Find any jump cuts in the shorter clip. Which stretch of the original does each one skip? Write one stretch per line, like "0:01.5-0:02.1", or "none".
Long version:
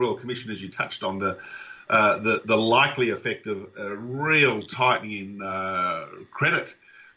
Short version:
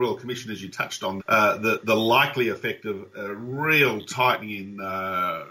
0:01.2-0:01.8